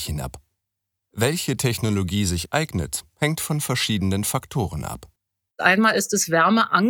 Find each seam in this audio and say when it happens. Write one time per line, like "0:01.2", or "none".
none